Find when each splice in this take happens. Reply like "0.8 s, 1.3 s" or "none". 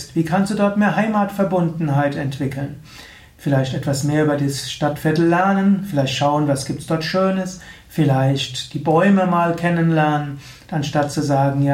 none

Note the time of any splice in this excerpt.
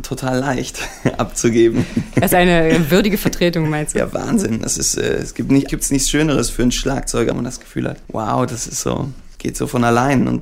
5.7 s, 7.3 s

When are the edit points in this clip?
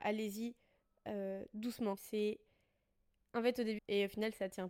2.0 s, 3.8 s

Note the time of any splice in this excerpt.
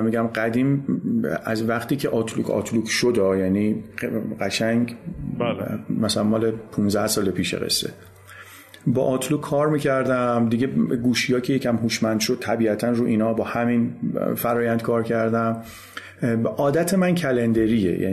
none

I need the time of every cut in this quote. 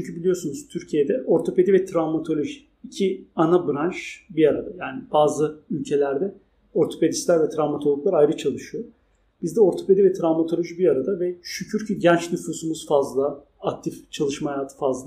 none

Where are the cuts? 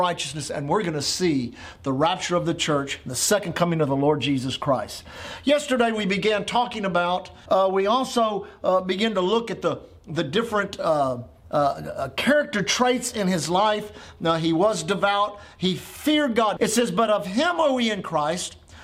7.5 s, 16.6 s

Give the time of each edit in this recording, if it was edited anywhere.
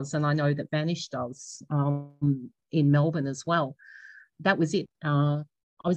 4.9 s

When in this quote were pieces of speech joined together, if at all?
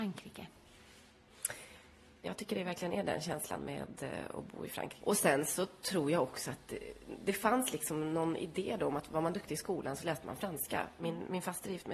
2.2 s, 5.0 s, 11.0 s

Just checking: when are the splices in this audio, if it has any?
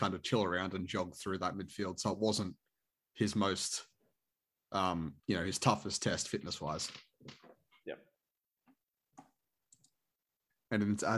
5.2 s

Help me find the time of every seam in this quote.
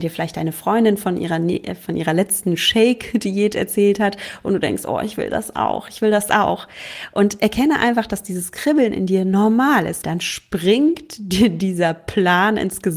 10.0 s

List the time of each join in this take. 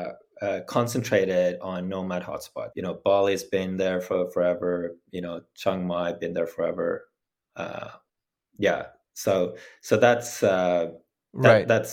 2.7 s

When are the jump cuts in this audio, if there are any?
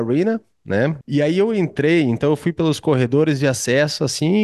1.0 s

